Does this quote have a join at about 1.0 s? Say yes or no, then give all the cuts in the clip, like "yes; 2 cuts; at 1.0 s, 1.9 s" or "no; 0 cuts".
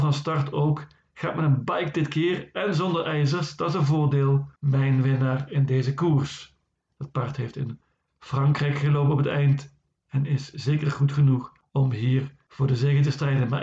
no; 2 cuts; at 4.6 s, 6.9 s